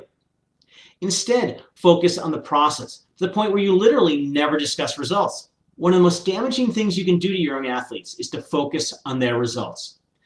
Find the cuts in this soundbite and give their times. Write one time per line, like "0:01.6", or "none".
0:01.8
0:05.6